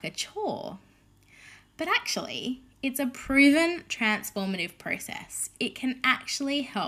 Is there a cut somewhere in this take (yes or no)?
no